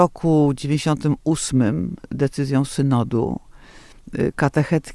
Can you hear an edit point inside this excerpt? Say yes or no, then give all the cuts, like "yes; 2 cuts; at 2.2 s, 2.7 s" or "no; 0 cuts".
no; 0 cuts